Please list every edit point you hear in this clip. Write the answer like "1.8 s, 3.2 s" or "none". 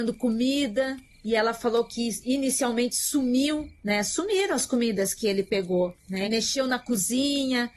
6.2 s

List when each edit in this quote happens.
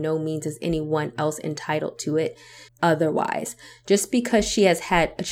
2.7 s

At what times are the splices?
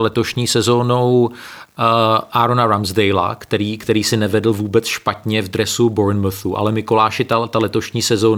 none

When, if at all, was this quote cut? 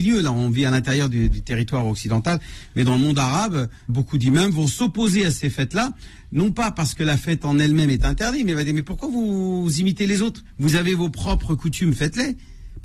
3.9 s

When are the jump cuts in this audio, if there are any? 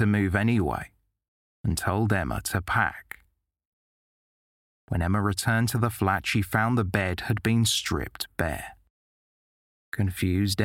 none

